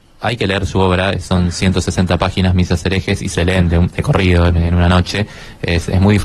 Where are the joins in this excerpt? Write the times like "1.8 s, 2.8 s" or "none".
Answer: none